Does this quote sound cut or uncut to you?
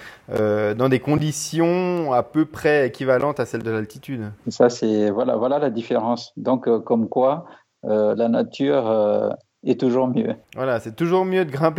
uncut